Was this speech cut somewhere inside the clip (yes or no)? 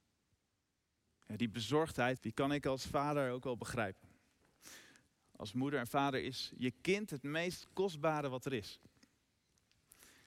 yes